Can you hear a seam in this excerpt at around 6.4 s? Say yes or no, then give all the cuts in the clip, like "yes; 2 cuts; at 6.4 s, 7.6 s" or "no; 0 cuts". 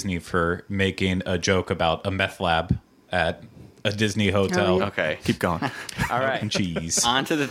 yes; 2 cuts; at 4.8 s, 6.4 s